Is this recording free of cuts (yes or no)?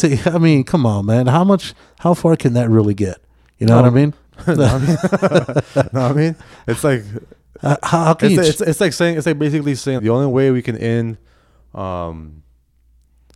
no